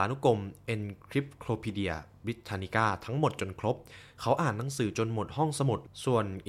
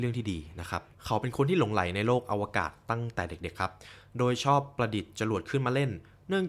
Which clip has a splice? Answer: second; 1 cut; at 0.9 s

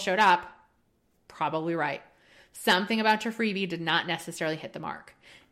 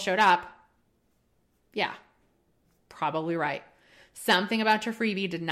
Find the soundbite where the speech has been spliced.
first; 1 cut; at 1.1 s

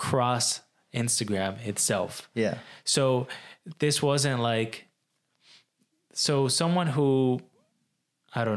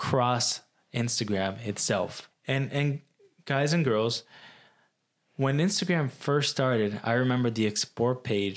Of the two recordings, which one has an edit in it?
second; 1 cut; at 2.3 s

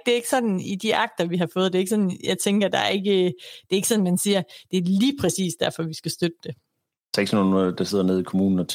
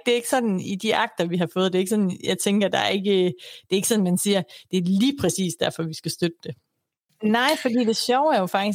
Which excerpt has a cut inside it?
second; 1 cut; at 7.1 s

